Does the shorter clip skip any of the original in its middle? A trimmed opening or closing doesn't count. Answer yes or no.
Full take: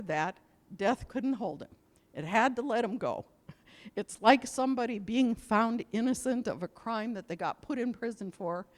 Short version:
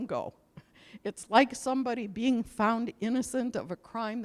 no